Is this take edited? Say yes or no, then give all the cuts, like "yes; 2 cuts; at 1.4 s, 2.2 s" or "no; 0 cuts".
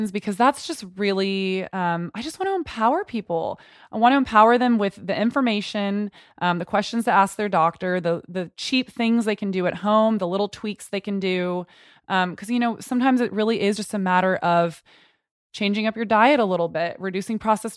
no; 0 cuts